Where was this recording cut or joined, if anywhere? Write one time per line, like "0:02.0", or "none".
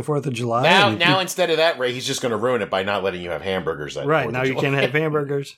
none